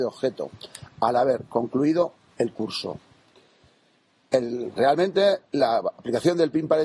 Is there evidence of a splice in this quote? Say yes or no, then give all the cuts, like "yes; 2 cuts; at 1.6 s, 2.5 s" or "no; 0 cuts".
no; 0 cuts